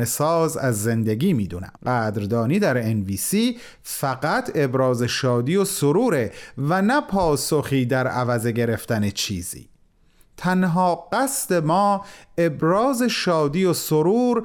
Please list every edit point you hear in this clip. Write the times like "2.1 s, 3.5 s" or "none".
1.8 s